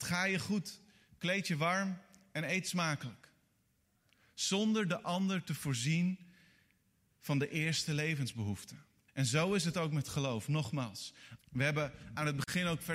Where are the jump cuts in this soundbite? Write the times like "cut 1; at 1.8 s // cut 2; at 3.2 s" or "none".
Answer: cut 1; at 9.1 s // cut 2; at 11.4 s